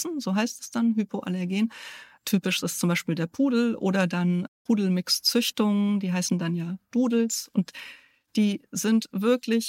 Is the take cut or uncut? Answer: uncut